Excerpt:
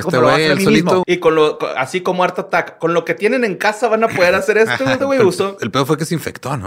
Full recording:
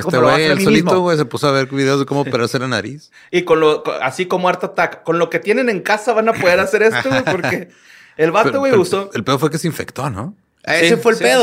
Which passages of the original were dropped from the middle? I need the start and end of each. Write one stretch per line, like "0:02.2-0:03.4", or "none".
0:01.0-0:03.3
0:07.3-0:08.5